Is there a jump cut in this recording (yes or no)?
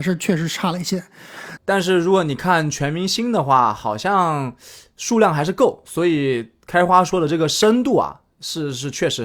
yes